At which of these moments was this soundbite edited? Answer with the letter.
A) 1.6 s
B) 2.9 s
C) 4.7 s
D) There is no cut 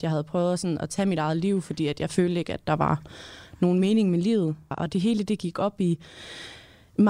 C